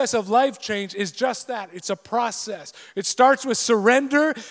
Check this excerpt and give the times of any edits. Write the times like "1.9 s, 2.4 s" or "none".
none

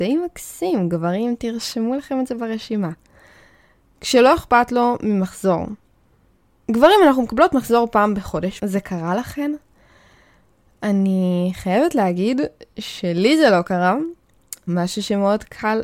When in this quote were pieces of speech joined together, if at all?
8.6 s, 14.7 s

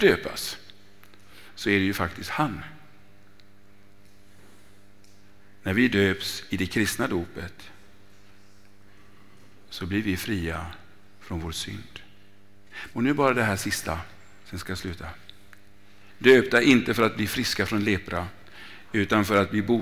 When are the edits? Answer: 12.9 s, 16.2 s

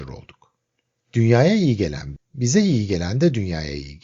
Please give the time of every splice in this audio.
1.0 s, 2.2 s

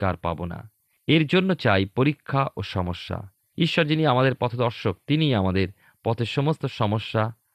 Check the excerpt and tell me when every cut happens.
none

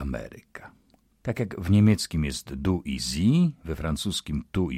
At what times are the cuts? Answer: 1.2 s

